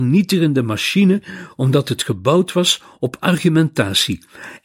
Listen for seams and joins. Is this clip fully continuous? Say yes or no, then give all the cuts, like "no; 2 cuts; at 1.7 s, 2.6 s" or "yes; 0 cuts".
yes; 0 cuts